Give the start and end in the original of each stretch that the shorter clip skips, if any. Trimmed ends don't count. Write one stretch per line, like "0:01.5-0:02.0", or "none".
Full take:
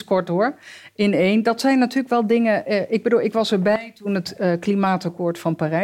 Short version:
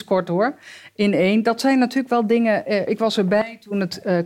0:02.9-0:03.2